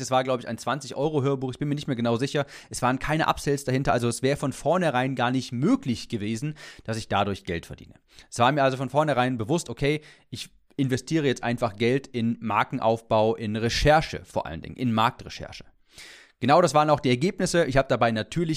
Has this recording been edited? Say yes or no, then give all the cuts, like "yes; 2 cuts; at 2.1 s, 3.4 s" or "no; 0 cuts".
no; 0 cuts